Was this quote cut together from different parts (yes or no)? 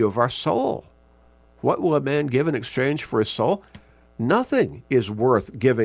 no